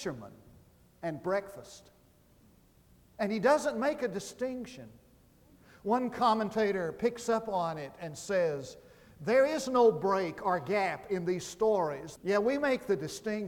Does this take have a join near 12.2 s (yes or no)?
yes